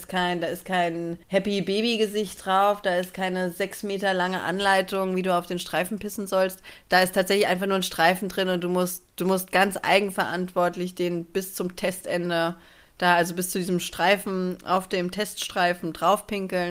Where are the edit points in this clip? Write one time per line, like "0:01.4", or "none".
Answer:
0:01.2